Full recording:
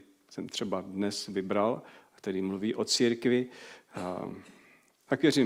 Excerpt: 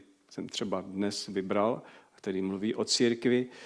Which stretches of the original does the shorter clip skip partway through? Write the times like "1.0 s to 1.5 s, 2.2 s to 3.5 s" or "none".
none